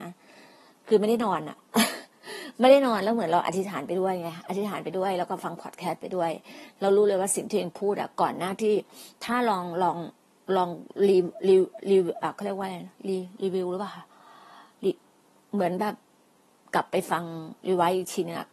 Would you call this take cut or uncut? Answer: uncut